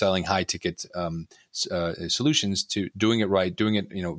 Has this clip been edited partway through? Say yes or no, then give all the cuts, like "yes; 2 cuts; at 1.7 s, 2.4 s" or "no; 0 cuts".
yes; 1 cut; at 2.9 s